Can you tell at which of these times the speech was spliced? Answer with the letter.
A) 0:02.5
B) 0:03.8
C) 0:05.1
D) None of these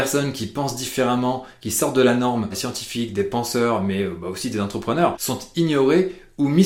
A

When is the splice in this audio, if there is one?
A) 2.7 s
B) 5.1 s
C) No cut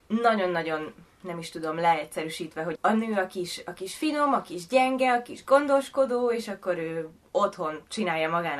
A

